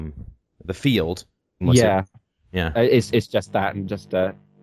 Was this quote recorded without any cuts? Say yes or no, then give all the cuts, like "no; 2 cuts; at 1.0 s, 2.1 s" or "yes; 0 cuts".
no; 1 cut; at 1.6 s